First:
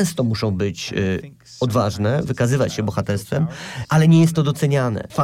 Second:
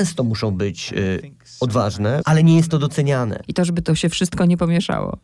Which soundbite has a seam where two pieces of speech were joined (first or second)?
second